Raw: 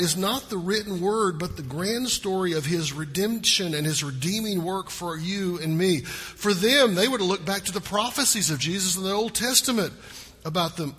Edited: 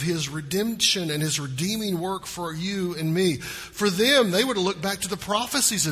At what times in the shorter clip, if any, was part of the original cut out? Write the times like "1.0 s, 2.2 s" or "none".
none